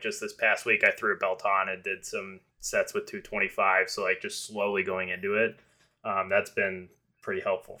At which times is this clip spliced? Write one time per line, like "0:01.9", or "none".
none